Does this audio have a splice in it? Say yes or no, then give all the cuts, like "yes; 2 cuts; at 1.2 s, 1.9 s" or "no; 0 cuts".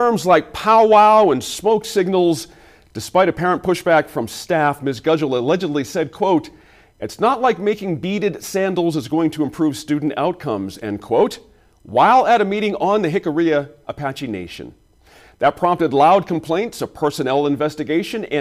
no; 0 cuts